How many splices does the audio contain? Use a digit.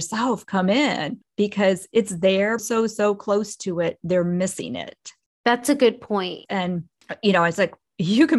2